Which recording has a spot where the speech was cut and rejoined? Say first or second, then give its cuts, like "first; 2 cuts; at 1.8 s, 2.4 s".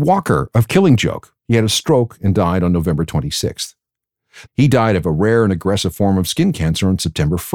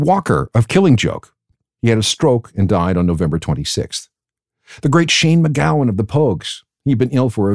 first; 2 cuts; at 1.4 s, 4.5 s